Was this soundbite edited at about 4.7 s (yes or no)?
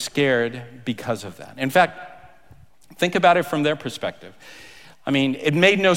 no